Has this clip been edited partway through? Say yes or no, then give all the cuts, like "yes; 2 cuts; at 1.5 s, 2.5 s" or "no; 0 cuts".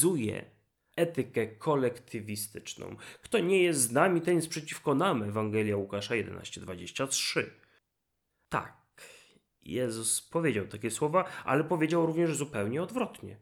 no; 0 cuts